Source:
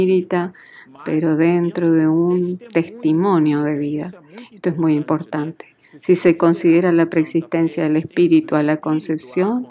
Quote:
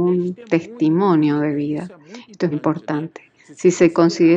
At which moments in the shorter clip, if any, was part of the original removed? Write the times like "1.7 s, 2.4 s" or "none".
2.5 s